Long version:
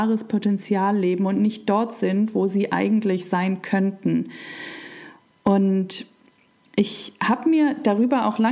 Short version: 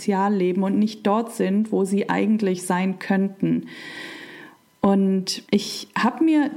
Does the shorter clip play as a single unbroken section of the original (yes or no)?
no